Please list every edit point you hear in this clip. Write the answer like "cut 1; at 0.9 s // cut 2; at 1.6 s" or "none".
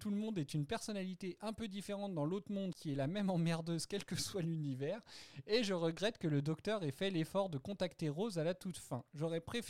cut 1; at 2.7 s